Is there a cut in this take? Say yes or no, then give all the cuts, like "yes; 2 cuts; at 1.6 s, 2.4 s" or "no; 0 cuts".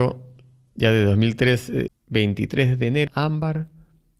yes; 2 cuts; at 1.9 s, 3.1 s